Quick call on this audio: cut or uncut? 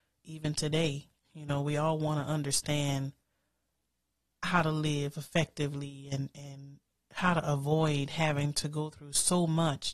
cut